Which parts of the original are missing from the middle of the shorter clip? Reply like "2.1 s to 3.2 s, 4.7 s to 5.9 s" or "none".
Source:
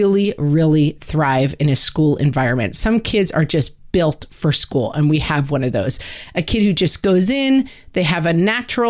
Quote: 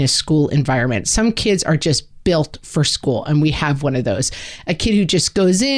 none